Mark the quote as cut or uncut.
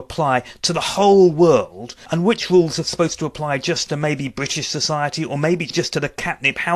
uncut